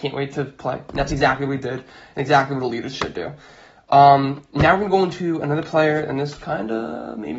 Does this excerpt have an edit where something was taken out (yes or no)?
no